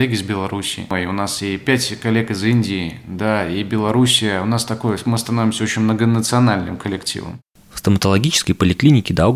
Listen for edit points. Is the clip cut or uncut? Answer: uncut